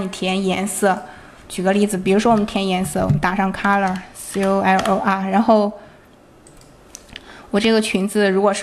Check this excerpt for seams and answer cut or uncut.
uncut